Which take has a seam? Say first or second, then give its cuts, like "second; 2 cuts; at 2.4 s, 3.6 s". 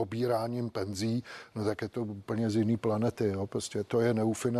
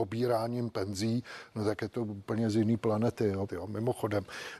second; 1 cut; at 3.5 s